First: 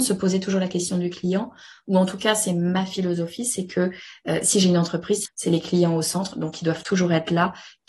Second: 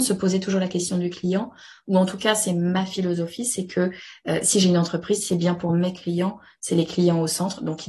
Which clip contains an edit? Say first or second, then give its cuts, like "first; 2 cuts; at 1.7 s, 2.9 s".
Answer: first; 1 cut; at 5.3 s